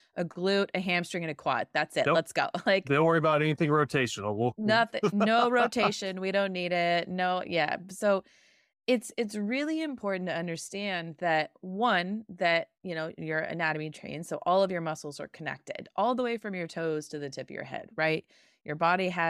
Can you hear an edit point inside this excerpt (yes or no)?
no